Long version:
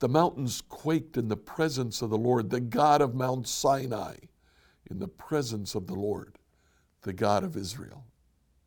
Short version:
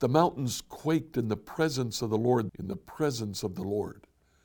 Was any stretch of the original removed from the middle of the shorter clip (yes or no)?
yes